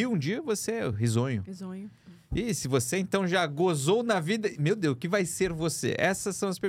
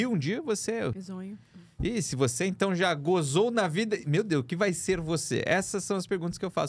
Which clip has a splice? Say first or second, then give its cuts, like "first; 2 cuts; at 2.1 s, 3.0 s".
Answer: second; 1 cut; at 0.9 s